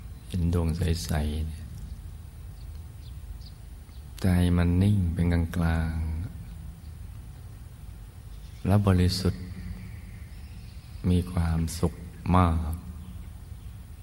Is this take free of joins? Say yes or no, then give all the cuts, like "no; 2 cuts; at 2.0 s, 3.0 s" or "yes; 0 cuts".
yes; 0 cuts